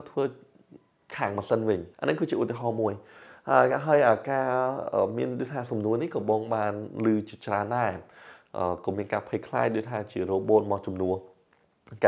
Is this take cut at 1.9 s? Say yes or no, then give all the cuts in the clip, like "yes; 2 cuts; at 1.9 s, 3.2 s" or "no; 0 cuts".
yes; 1 cut; at 1.9 s